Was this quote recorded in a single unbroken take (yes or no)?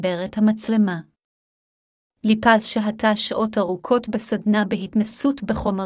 yes